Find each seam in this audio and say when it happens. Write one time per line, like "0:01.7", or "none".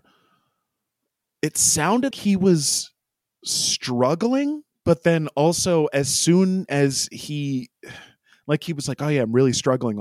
0:02.1